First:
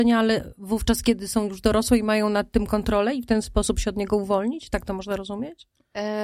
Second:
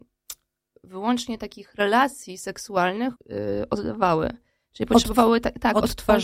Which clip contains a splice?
second; 1 cut; at 3.2 s

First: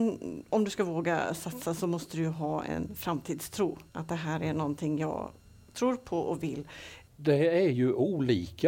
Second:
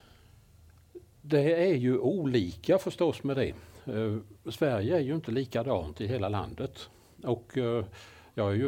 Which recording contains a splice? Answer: first; 2 cuts; at 3.9 s, 7.1 s

